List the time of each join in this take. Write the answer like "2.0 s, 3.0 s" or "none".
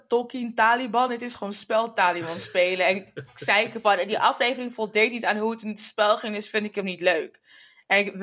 none

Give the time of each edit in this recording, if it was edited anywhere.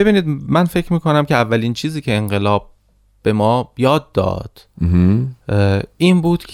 none

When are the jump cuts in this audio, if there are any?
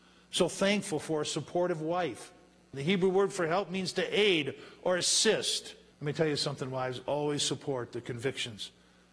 2.7 s, 5.9 s

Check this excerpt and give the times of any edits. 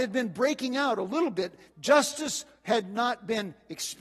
1.7 s

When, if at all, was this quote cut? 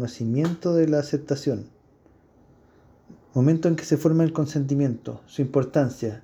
3.2 s

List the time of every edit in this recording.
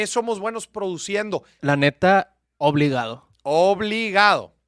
1.6 s

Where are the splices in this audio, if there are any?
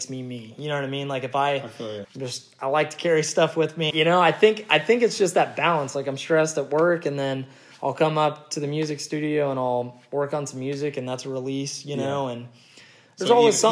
2.0 s, 3.9 s

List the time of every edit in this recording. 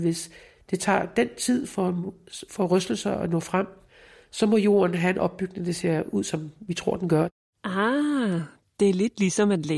none

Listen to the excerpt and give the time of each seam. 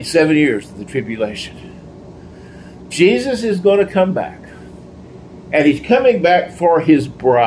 none

